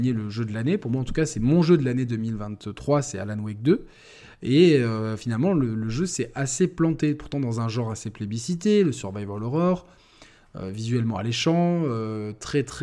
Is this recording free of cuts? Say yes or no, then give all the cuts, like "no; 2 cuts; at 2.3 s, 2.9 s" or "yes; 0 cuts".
yes; 0 cuts